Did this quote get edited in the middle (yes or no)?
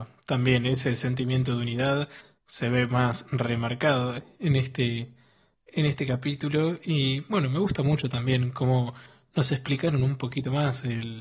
no